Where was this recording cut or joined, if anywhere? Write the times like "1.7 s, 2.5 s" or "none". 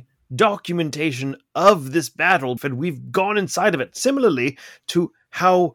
2.6 s